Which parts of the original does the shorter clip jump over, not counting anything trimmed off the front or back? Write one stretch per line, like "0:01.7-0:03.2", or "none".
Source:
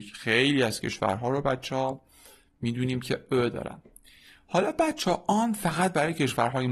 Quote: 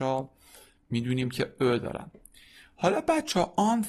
none